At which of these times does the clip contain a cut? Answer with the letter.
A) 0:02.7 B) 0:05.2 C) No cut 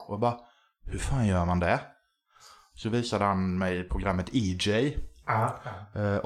C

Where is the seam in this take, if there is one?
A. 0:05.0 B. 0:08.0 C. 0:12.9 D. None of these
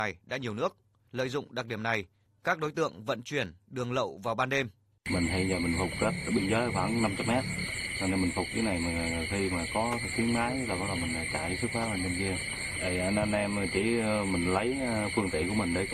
A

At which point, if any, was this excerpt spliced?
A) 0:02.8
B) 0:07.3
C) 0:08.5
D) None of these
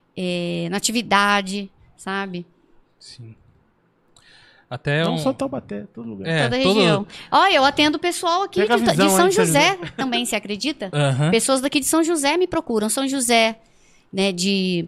A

